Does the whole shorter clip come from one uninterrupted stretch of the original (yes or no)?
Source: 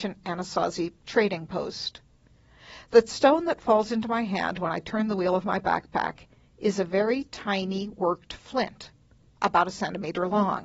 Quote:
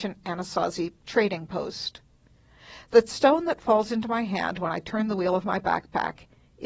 yes